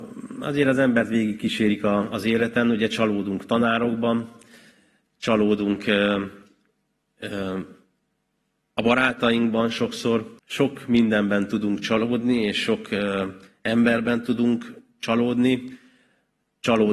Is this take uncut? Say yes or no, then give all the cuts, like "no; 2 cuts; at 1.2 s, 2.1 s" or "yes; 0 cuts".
no; 1 cut; at 10.4 s